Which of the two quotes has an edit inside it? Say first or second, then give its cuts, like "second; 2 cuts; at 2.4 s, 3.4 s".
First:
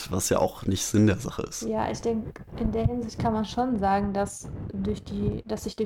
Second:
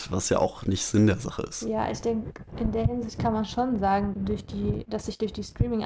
second; 1 cut; at 4.1 s